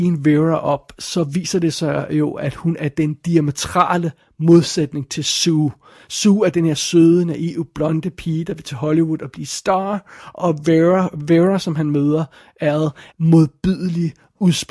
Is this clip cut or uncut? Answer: cut